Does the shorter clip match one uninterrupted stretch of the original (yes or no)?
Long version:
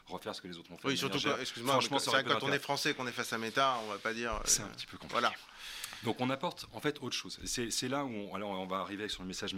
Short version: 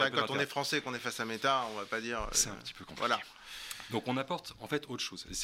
yes